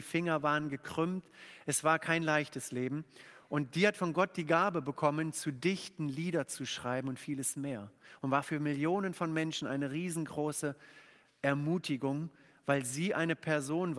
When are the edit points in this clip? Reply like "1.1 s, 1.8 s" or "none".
none